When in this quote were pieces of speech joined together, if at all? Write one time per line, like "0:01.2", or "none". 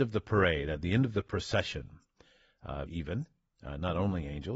0:02.9